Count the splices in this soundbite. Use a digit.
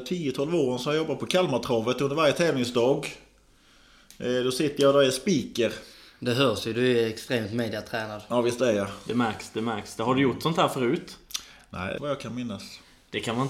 1